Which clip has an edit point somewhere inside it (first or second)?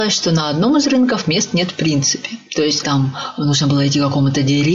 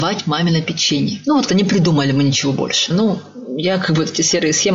second